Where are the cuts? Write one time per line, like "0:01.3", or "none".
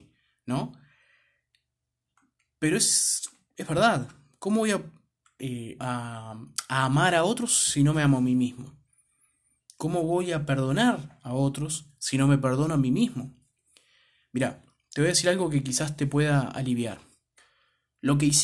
0:05.8